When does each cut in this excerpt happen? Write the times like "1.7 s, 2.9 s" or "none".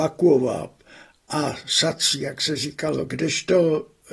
none